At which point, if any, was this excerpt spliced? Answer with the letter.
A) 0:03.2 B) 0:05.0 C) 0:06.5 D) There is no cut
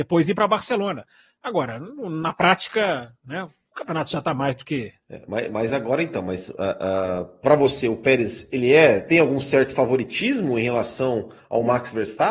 B